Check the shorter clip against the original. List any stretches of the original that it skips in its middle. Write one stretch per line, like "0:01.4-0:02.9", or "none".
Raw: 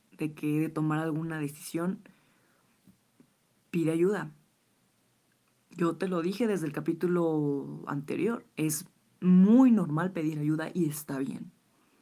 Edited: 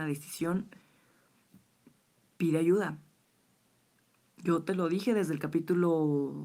none